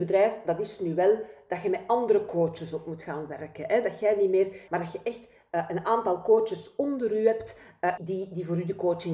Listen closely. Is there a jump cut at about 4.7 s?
yes; 2 cuts; at 4.7 s, 8.0 s

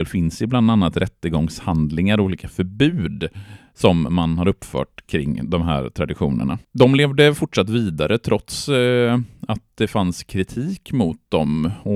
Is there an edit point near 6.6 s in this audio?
no; 0 cuts

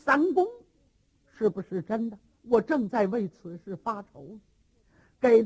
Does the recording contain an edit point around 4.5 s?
no; 1 cut; at 2.4 s

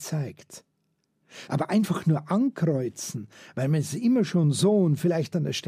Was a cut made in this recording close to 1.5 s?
yes; 1 cut; at 1.5 s

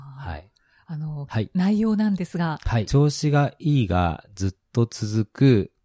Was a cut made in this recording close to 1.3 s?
yes; 2 cuts; at 1.3 s, 2.9 s

